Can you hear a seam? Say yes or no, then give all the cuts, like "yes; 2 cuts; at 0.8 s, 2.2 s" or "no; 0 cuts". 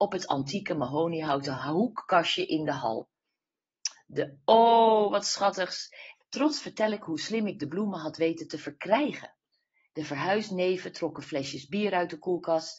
yes; 1 cut; at 6.2 s